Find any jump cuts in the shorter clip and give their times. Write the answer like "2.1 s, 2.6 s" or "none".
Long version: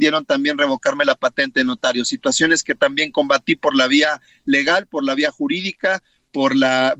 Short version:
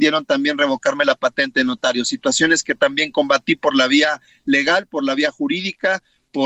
none